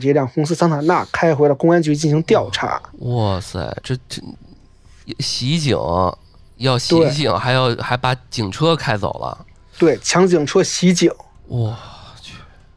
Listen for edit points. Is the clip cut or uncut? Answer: uncut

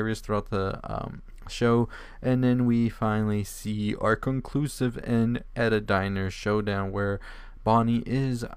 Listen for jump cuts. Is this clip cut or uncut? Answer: uncut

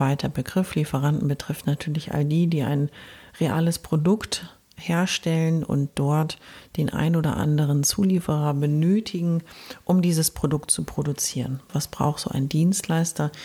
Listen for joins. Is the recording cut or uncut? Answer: cut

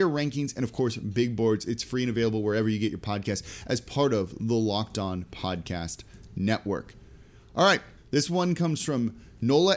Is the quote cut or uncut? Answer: cut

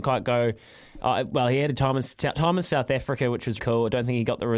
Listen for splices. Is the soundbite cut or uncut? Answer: cut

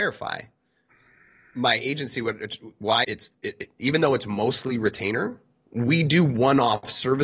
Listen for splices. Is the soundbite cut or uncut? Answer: cut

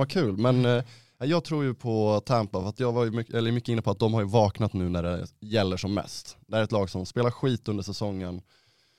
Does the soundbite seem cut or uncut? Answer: uncut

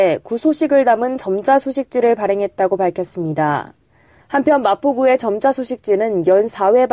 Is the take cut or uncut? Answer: cut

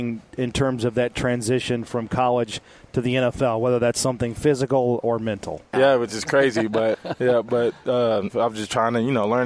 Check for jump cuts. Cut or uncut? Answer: cut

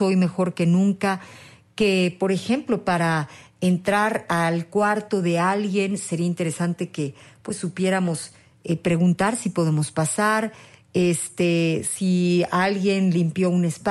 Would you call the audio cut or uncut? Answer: uncut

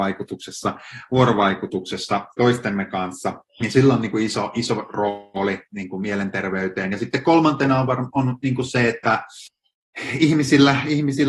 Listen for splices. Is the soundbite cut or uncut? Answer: cut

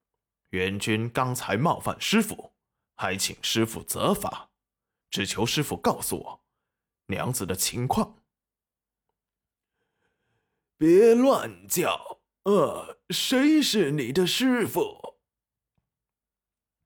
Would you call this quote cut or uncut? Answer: uncut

